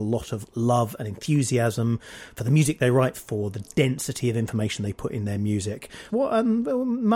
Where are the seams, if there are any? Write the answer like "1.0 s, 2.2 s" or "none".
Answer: 3.1 s, 6.1 s